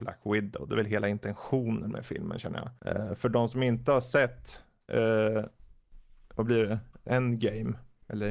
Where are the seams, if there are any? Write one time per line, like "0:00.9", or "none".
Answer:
0:07.1

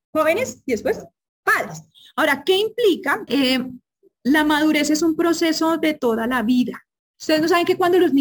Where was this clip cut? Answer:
0:03.3
0:07.1

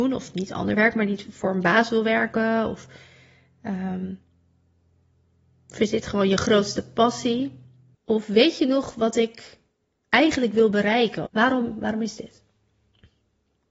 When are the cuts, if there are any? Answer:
0:07.9
0:11.3

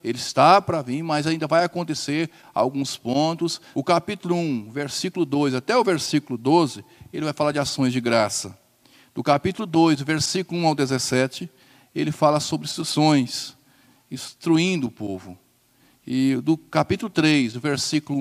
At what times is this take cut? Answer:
0:03.7

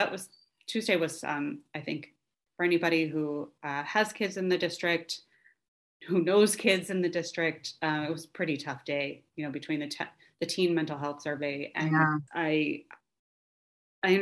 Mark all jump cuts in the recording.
0:12.3

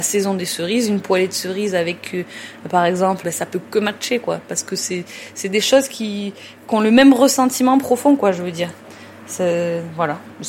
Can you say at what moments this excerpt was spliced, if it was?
0:03.2

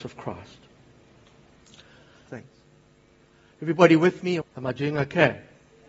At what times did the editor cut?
0:02.3
0:04.4

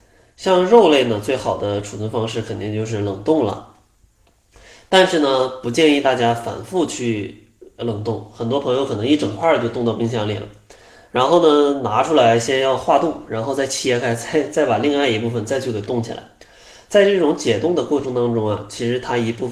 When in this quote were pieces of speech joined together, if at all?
none

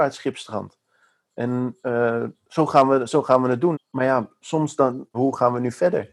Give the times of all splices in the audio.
0:03.7
0:05.1

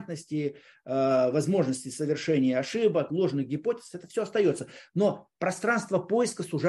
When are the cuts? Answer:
none

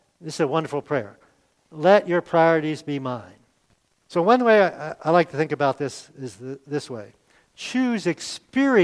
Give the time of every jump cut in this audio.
0:04.0

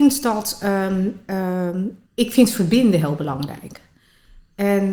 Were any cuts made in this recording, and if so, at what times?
0:02.1

